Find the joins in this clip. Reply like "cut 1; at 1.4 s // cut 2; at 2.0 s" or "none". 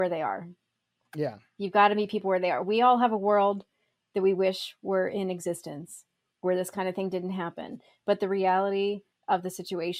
none